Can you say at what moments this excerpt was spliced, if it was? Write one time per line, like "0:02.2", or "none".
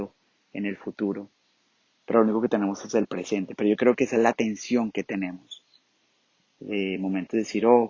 none